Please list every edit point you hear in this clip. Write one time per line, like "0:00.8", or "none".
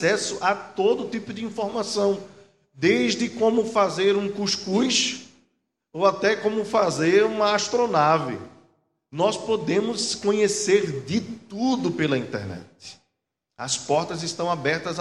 none

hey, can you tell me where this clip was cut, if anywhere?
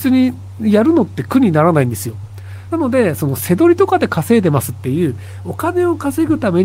0:02.7

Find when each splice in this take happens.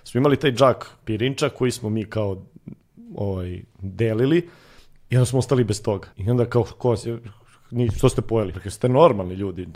0:06.1
0:08.5

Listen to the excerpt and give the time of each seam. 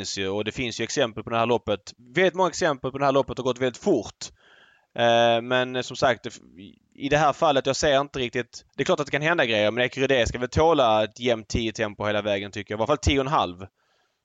0:08.7

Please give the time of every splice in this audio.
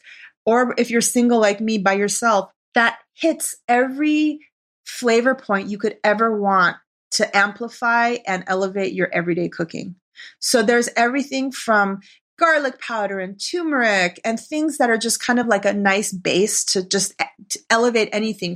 none

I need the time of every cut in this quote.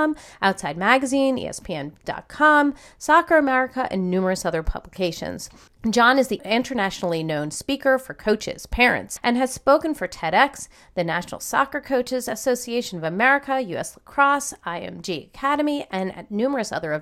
0:09.2

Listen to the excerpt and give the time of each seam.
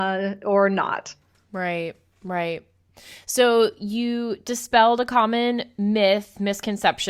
none

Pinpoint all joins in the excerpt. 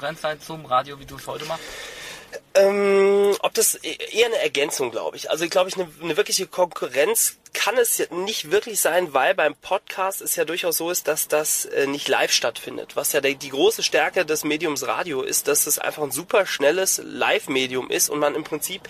none

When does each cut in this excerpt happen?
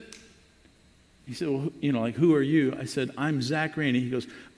none

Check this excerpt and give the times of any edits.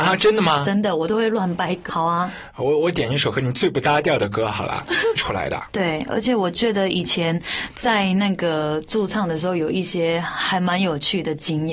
0:01.9
0:05.2

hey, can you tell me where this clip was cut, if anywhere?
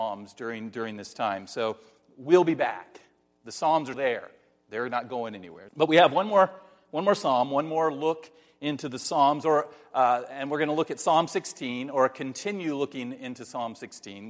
0:03.9
0:05.7

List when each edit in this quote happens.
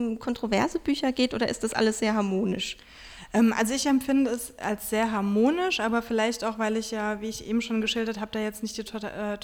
none

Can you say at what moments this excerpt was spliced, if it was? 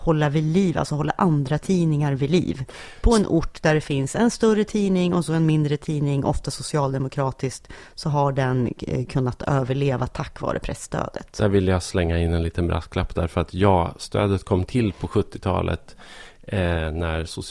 none

